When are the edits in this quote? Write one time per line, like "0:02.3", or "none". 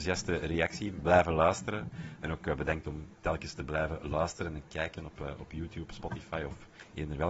0:02.2